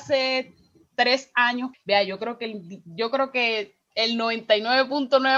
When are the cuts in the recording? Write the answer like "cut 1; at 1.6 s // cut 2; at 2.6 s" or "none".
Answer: cut 1; at 1.7 s